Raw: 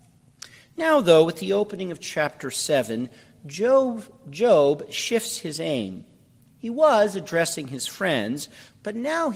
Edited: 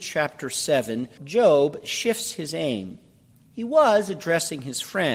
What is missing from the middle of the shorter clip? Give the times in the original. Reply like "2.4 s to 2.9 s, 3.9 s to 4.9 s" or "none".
3.2 s to 4.2 s